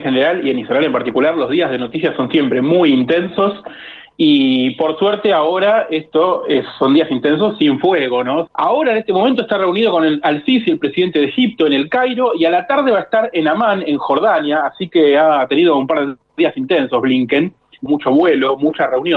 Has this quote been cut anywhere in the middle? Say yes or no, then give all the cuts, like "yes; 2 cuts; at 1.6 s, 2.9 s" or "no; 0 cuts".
yes; 2 cuts; at 8.5 s, 17.9 s